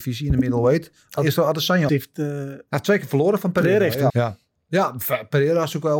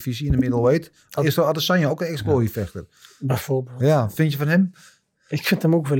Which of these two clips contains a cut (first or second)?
first